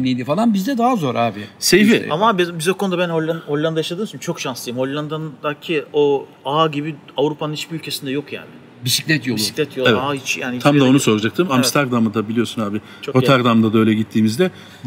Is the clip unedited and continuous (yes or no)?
yes